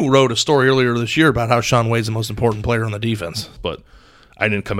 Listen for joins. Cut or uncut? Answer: cut